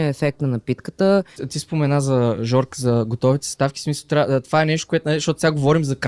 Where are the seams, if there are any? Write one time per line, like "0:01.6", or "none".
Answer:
0:01.4